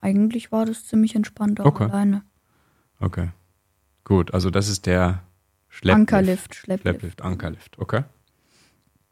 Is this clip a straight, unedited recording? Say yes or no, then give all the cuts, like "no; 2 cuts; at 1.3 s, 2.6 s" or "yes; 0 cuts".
yes; 0 cuts